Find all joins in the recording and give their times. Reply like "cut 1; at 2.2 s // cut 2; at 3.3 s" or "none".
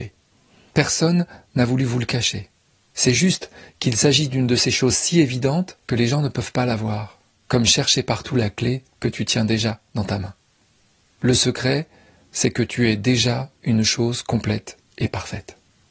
cut 1; at 5.8 s